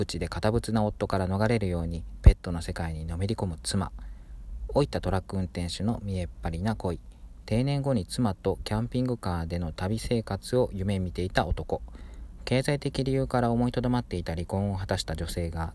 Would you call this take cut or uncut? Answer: cut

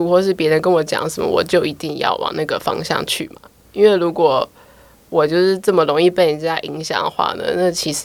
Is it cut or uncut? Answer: uncut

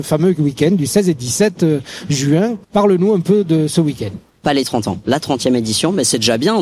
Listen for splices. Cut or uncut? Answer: cut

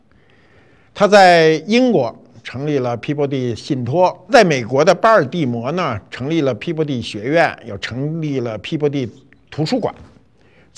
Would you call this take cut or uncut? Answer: uncut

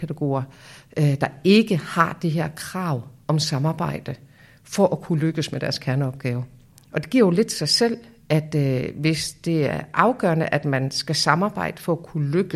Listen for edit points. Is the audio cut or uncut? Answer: uncut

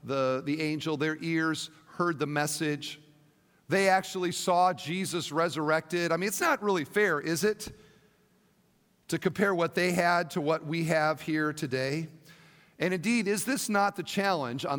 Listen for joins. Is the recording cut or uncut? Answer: uncut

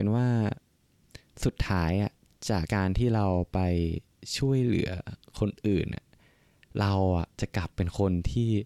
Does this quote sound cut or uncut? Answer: cut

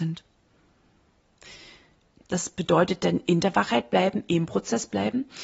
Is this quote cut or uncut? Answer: cut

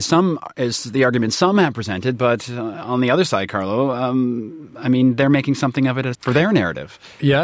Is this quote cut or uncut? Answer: cut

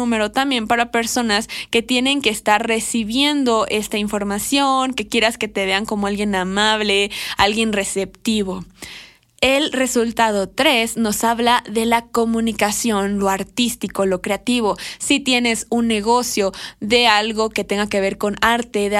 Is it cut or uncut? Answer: uncut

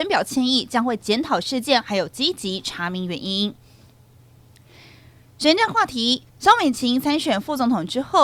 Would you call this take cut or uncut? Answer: cut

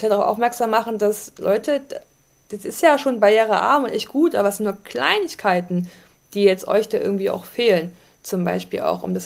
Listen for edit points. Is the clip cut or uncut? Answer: uncut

